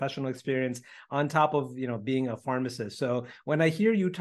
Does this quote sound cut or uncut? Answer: uncut